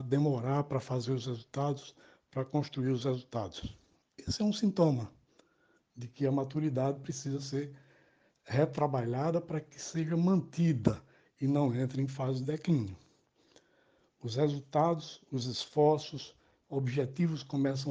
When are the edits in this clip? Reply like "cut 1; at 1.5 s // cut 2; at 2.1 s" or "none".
cut 1; at 16.6 s